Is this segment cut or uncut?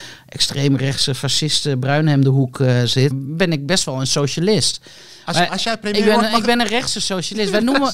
cut